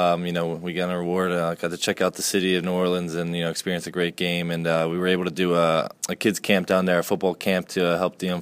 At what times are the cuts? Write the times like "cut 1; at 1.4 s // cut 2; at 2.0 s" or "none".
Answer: cut 1; at 6.0 s